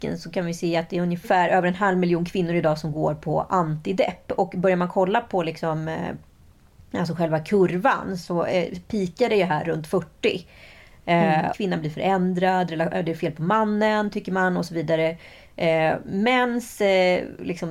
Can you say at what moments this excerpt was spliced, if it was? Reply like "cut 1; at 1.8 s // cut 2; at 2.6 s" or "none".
cut 1; at 11.5 s